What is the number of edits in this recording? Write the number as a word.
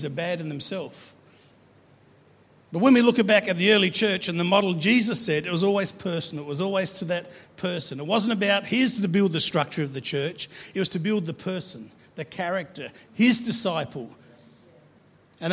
zero